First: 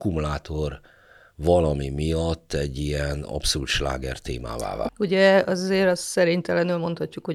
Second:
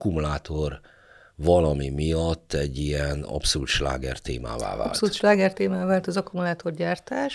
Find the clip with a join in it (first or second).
first